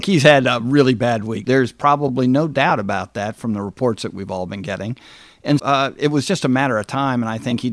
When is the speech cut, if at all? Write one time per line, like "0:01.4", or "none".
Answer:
0:01.4
0:05.6